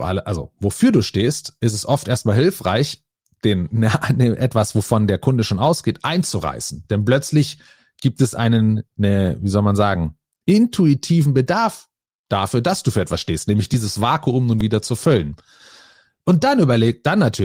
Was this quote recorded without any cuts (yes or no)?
yes